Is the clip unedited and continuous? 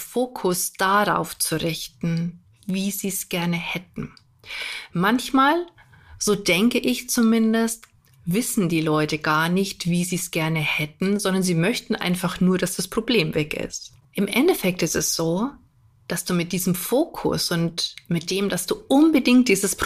no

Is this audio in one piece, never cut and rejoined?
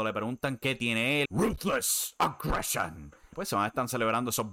no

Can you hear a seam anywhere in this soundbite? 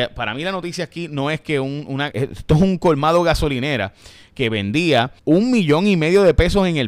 yes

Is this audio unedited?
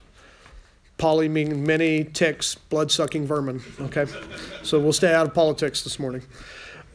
yes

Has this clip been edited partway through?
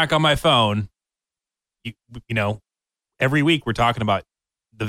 no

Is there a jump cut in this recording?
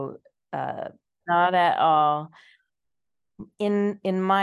yes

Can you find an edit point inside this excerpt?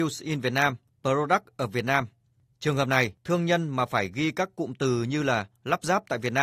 no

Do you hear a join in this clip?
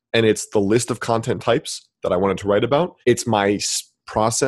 yes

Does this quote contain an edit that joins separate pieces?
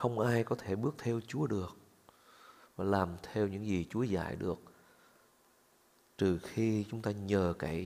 no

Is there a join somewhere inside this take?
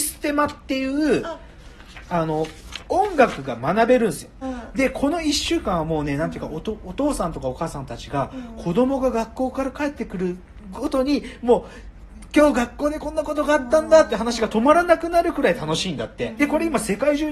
yes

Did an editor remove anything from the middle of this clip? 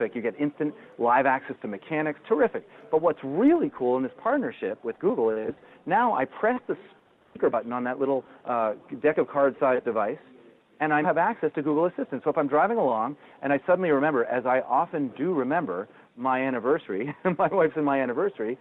yes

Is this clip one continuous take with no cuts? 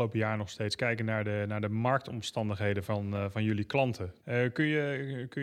no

